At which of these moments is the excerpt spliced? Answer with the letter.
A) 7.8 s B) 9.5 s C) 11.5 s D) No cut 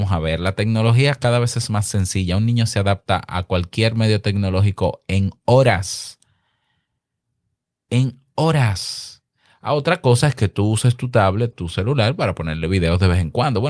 C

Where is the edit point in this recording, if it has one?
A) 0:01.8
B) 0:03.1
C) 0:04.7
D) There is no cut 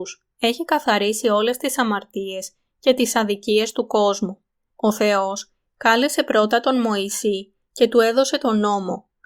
C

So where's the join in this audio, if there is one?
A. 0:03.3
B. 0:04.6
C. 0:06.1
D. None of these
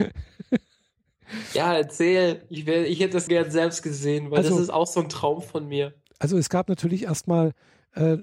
A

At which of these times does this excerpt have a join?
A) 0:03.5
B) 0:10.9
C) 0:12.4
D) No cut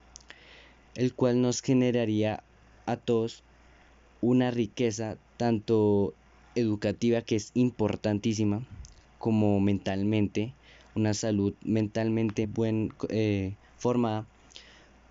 C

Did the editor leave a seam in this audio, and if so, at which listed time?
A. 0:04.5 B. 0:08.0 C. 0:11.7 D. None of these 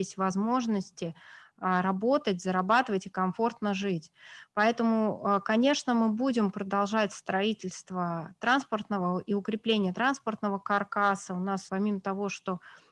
C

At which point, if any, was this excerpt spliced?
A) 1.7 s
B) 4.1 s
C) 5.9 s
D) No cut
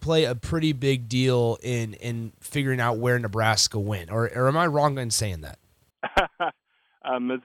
C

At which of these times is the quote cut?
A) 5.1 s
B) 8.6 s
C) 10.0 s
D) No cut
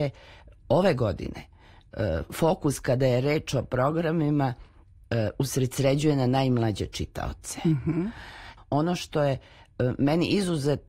B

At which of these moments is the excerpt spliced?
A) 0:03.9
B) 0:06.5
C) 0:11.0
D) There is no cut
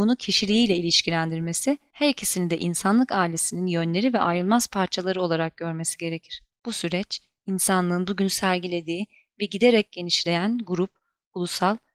B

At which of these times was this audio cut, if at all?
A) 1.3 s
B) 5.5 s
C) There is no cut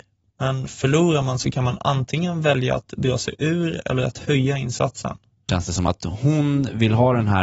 B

